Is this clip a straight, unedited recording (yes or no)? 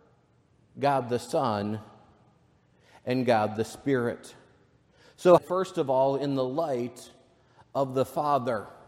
no